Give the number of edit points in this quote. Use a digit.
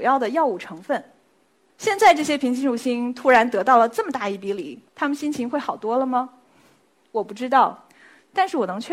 1